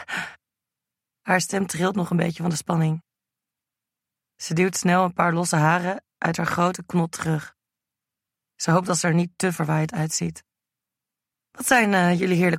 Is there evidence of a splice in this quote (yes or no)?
no